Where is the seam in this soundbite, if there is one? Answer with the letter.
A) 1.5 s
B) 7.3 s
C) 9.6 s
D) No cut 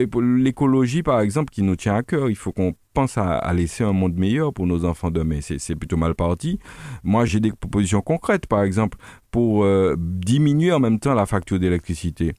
B